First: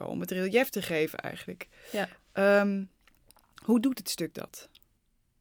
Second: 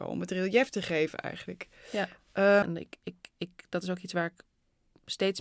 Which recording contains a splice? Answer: second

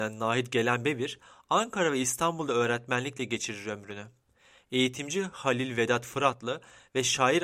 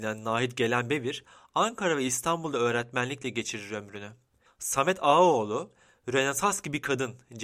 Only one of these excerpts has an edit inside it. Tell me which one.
second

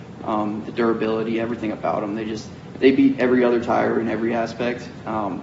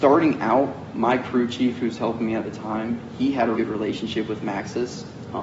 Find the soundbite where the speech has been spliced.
second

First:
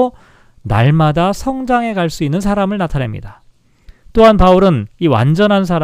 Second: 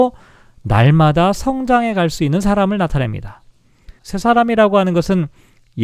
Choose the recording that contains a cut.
second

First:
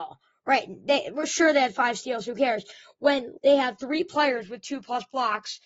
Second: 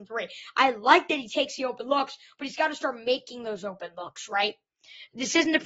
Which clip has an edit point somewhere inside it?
first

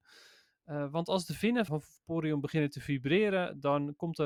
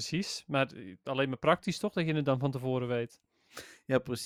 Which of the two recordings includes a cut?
first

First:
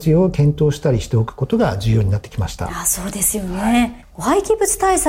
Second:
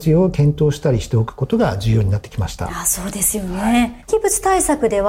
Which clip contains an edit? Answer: second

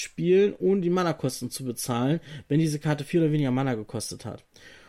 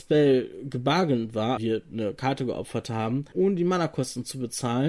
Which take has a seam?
second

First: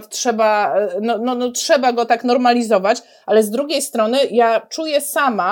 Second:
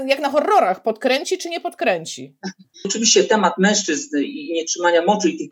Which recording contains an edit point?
second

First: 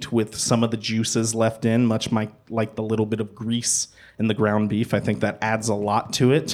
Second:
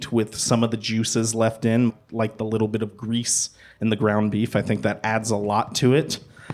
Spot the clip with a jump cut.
second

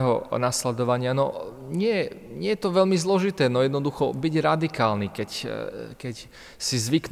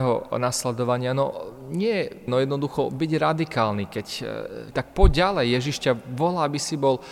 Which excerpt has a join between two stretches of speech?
second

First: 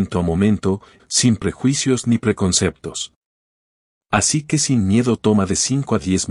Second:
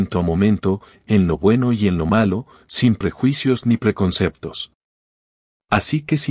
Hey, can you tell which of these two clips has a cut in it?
first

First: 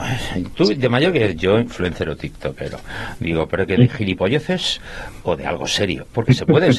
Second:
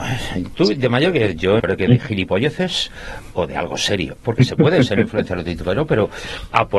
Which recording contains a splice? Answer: second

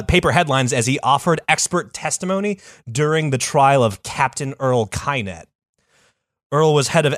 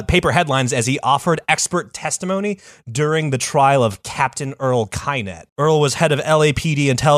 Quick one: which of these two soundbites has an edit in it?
second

